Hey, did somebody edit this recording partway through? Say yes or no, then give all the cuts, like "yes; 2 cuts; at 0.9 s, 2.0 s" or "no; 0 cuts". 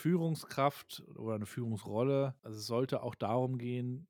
no; 0 cuts